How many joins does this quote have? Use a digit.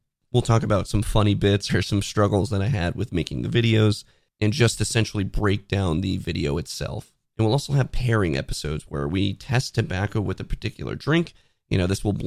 2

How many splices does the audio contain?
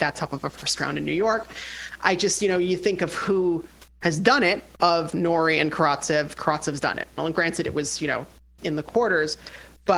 2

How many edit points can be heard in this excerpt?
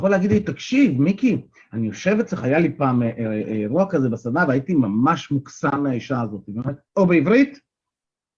1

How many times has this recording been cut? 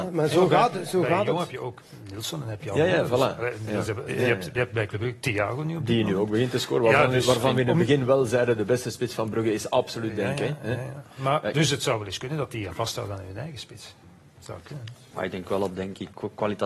1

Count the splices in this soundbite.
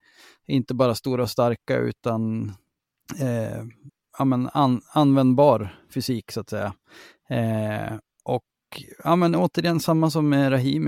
0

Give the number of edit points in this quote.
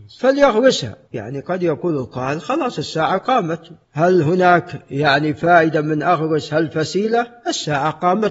2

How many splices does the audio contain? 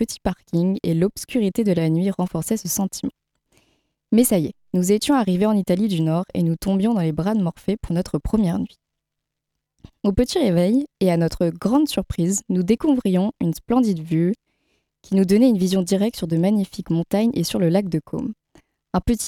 0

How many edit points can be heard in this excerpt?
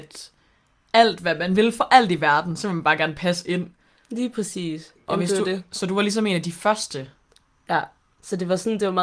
0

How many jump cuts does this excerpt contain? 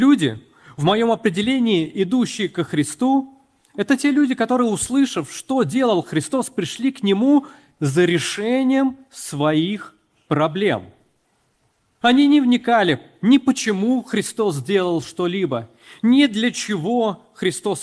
1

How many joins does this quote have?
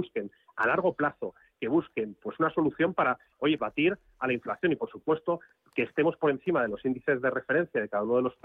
1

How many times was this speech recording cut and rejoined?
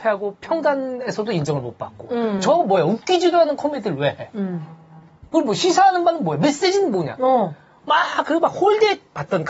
0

